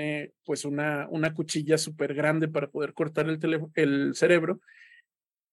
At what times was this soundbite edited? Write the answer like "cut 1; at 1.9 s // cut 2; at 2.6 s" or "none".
none